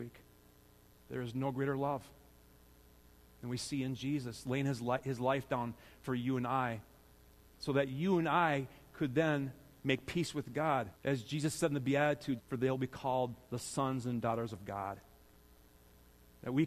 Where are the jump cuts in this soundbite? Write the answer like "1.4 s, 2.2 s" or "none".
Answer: 1.0 s, 11.0 s, 12.4 s